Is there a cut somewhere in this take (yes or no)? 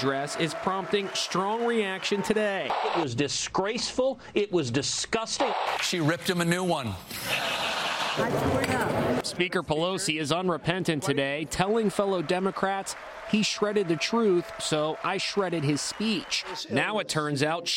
no